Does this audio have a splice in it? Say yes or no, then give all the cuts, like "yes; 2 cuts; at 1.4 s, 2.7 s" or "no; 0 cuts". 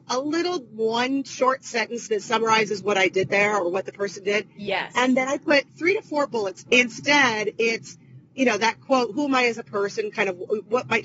yes; 1 cut; at 6.7 s